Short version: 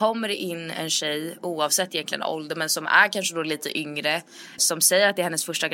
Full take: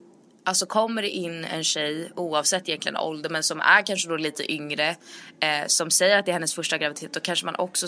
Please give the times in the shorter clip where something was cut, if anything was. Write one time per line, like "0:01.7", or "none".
0:04.6